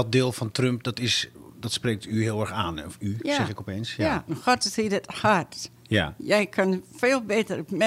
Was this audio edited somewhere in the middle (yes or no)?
yes